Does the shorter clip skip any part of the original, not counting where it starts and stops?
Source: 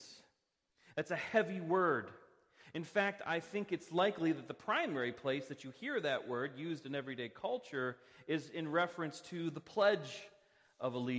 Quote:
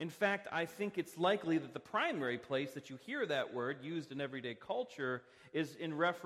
no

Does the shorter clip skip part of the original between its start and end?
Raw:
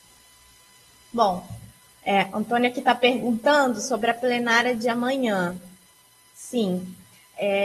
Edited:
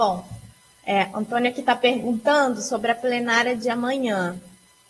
no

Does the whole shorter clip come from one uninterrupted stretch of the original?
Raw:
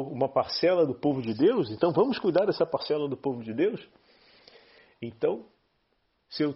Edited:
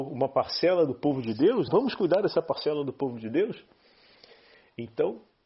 no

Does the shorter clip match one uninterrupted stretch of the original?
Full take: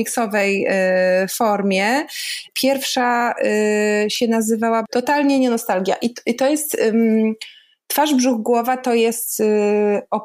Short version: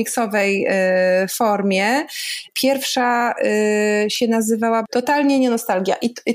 yes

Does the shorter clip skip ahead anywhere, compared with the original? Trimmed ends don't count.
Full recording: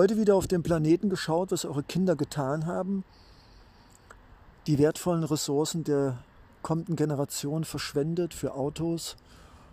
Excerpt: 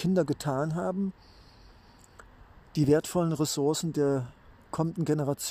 no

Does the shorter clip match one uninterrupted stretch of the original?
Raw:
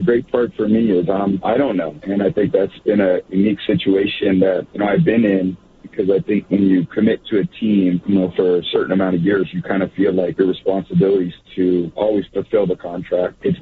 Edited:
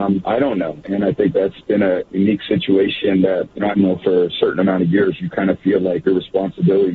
no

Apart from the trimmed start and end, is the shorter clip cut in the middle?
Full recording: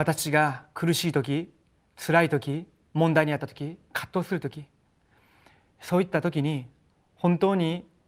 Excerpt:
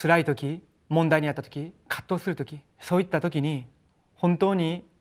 yes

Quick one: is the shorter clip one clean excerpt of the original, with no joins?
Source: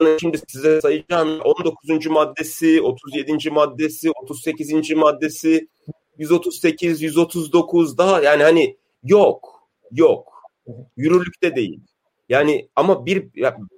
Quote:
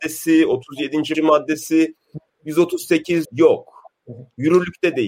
no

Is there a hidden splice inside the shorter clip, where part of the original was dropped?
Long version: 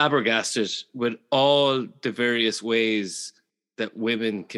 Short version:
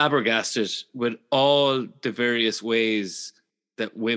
no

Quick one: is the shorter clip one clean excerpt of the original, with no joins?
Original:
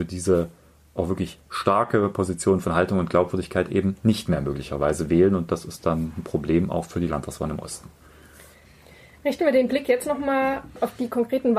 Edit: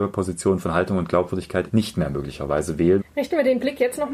no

